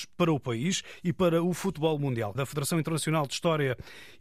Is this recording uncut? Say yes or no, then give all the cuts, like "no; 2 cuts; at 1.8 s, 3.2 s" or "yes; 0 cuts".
no; 1 cut; at 2.4 s